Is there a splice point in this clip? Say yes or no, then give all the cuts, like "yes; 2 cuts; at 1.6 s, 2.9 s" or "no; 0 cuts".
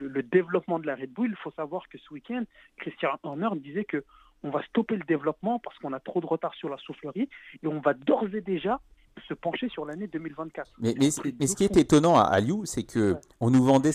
no; 0 cuts